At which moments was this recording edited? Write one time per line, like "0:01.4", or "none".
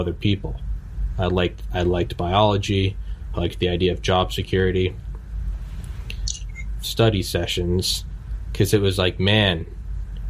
0:06.8

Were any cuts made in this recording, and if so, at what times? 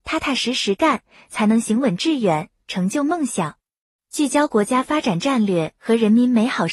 0:04.0

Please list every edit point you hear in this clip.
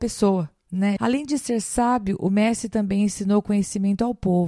0:01.0

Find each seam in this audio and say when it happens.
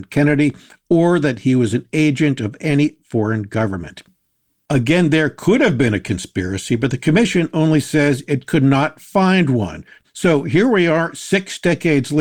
0:10.0

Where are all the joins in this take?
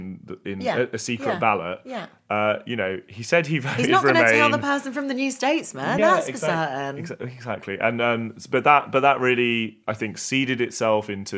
none

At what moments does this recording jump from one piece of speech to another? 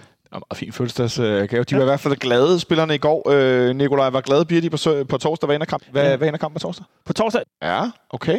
0:05.8
0:07.4

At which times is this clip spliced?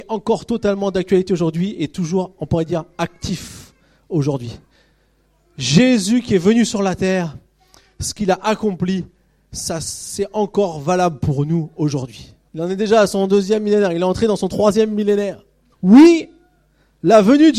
0:12.5
0:15.7

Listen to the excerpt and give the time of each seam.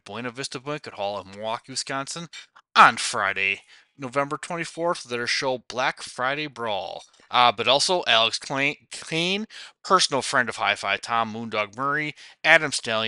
0:07.3

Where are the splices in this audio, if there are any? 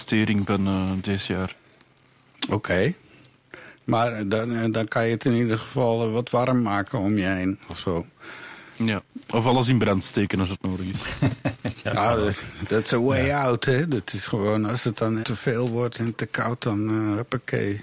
0:15.2

